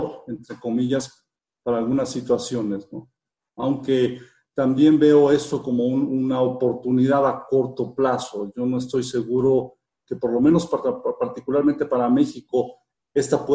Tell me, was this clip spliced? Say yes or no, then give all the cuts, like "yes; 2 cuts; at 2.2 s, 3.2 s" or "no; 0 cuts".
no; 0 cuts